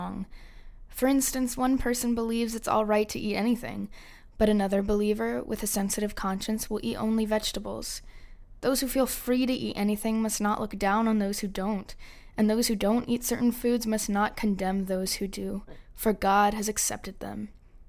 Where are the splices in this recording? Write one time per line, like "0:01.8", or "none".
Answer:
none